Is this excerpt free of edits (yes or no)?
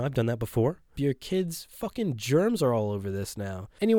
no